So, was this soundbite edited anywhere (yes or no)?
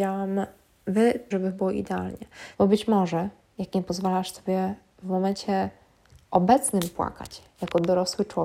yes